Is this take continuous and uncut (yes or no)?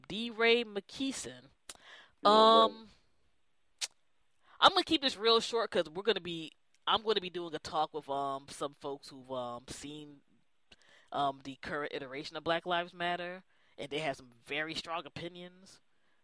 yes